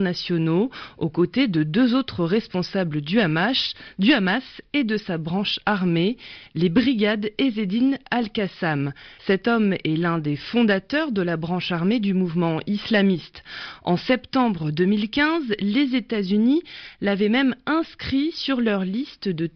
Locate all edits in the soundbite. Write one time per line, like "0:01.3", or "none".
0:09.2